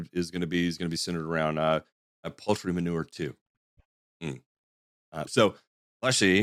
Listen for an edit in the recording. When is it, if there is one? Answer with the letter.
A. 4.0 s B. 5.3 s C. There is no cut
B